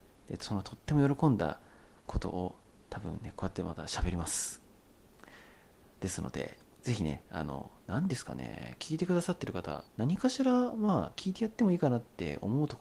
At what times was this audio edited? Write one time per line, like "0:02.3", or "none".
0:07.8
0:09.8

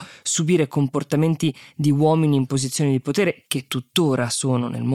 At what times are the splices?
none

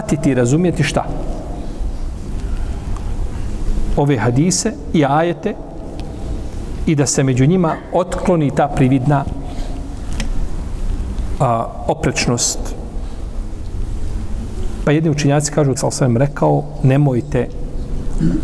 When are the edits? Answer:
0:15.8

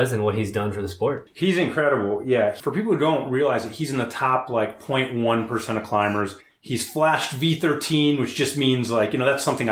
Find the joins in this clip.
none

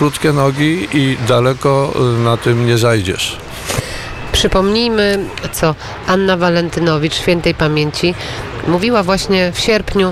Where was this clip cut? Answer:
0:05.5

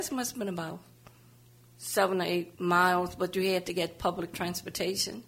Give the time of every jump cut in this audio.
none

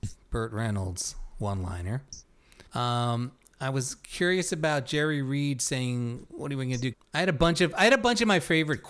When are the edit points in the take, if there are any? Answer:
0:02.7
0:06.9

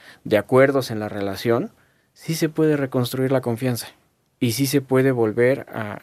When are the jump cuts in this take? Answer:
none

